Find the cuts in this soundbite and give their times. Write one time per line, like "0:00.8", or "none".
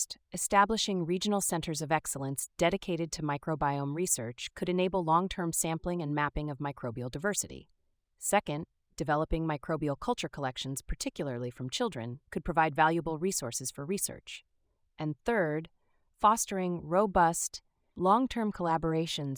none